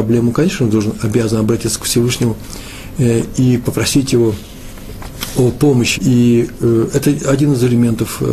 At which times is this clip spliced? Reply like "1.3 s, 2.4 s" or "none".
5.9 s